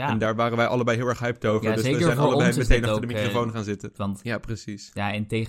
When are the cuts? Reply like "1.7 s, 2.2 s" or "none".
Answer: 4.0 s